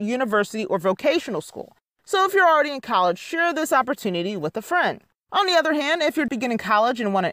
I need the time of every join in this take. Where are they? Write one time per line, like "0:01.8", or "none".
0:06.3

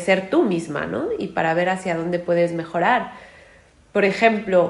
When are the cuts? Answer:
none

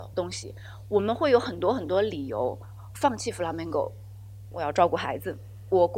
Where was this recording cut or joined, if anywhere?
0:04.5

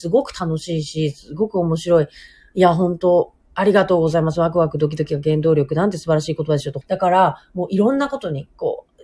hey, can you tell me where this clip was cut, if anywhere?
0:06.8

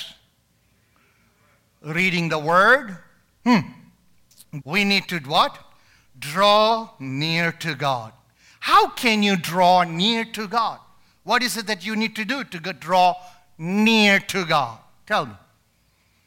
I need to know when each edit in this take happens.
0:04.6

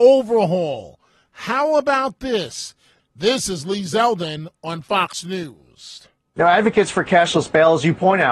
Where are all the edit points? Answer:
0:03.0

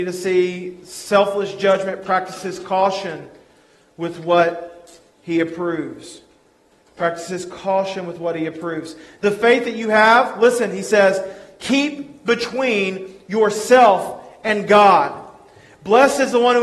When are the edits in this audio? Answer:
none

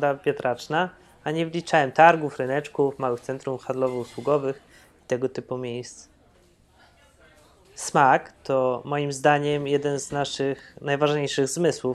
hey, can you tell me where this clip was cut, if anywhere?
none

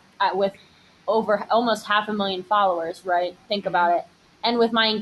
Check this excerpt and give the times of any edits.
none

